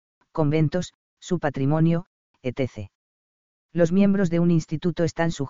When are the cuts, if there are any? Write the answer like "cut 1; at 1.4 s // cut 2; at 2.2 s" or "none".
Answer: cut 1; at 1.2 s